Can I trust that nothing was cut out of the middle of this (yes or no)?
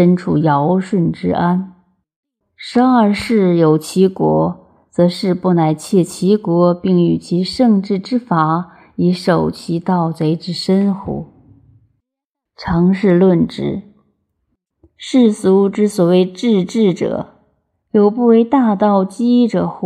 no